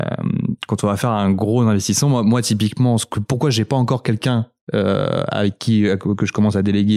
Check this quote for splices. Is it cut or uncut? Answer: uncut